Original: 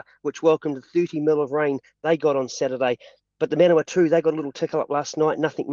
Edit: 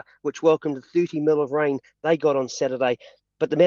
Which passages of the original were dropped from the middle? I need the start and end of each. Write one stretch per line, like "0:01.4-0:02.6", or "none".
none